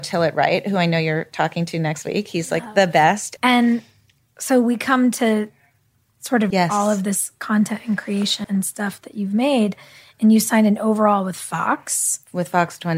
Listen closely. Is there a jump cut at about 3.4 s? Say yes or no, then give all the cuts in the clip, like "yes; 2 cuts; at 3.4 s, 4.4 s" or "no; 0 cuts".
yes; 3 cuts; at 3.4 s, 6.5 s, 8.4 s